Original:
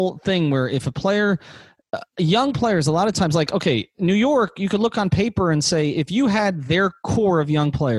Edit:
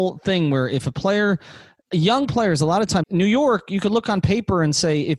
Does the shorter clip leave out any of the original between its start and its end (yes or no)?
yes